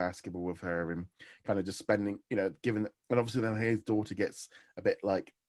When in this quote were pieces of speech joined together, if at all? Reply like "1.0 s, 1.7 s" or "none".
none